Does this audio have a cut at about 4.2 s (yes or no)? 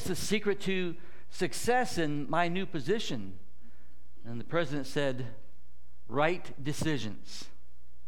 no